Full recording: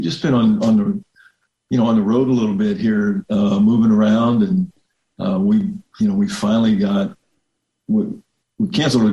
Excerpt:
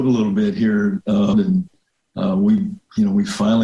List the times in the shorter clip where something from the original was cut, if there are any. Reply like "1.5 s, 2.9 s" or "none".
1.3 s